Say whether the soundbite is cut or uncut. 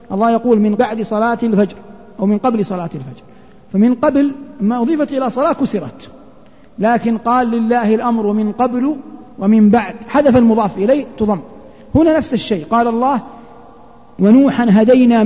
cut